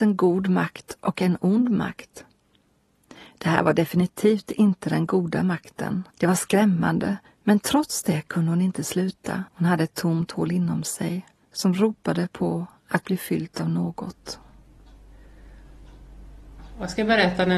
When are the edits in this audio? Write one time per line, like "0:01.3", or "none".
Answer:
0:06.1
0:09.5